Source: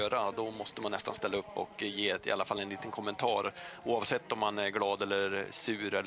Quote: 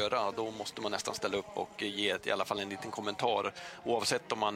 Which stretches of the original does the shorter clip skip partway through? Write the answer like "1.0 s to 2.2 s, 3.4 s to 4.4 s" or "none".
none